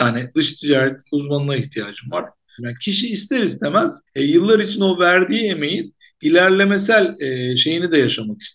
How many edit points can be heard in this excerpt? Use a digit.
2